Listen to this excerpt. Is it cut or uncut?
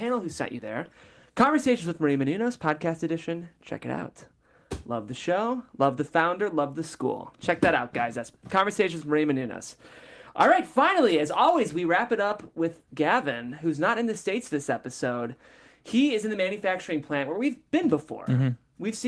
uncut